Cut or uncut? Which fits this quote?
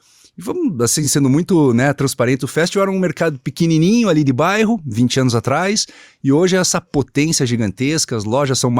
uncut